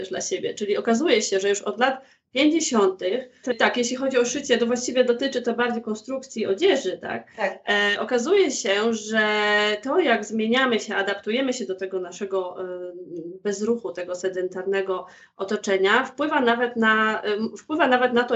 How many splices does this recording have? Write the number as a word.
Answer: one